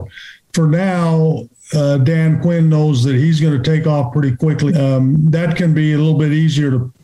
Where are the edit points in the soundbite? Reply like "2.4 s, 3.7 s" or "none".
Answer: 4.7 s